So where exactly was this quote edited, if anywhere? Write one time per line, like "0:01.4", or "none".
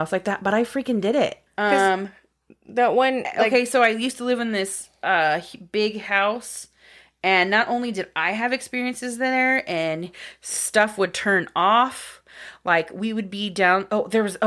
0:01.5